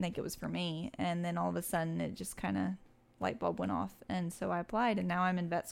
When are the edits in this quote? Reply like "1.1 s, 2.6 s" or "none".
none